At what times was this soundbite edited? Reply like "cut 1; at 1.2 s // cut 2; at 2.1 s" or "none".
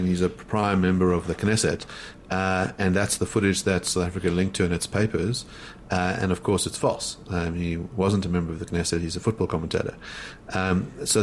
none

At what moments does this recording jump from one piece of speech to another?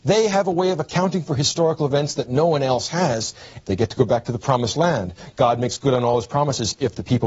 cut 1; at 3.6 s

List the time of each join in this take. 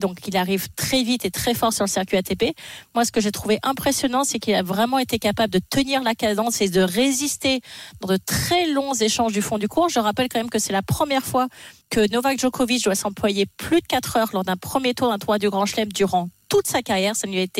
cut 1; at 11.8 s

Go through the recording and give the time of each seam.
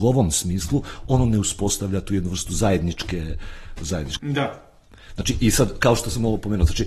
cut 1; at 4.2 s

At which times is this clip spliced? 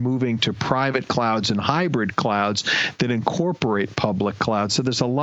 none

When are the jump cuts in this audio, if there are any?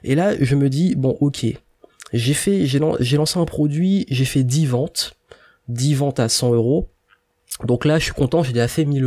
none

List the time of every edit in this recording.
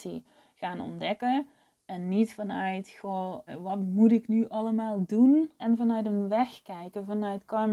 cut 1; at 3.5 s // cut 2; at 5.6 s

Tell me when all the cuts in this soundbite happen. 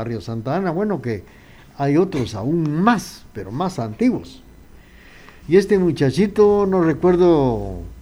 cut 1; at 5.4 s

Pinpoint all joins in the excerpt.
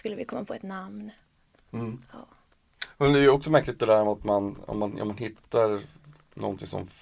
cut 1; at 1.5 s

